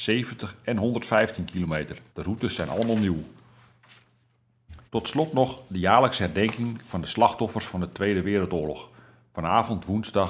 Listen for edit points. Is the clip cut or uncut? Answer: cut